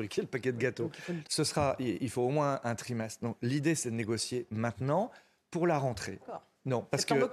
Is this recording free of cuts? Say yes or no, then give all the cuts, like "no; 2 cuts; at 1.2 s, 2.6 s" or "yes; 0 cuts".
no; 2 cuts; at 1.2 s, 6.2 s